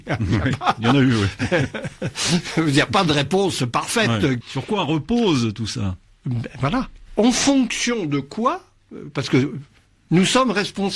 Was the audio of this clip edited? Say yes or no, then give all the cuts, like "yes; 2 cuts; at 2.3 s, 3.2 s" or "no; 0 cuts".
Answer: yes; 1 cut; at 4.4 s